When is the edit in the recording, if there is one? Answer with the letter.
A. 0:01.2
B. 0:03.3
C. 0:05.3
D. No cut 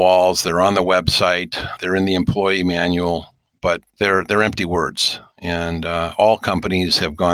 D